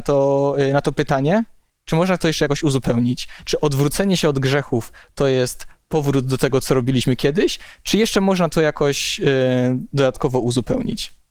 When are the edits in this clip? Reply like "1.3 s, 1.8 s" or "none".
none